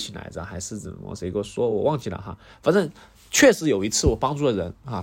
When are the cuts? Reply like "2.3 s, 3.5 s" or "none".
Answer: none